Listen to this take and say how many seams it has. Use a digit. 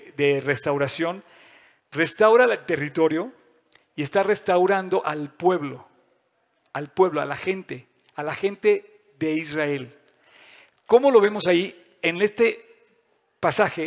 0